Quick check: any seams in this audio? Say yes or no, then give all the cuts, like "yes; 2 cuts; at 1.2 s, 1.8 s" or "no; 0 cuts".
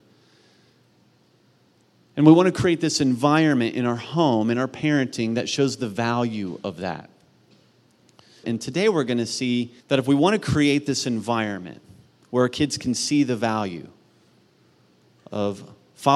yes; 2 cuts; at 8.4 s, 9.8 s